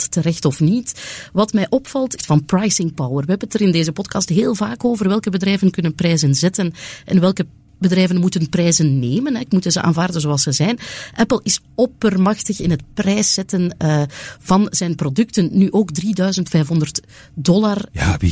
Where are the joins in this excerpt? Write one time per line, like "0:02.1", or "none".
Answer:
0:02.2